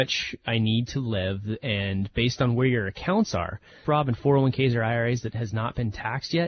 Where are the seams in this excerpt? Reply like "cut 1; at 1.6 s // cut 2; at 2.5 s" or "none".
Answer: cut 1; at 3.8 s